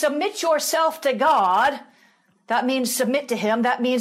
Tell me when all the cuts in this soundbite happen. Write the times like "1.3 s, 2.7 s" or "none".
none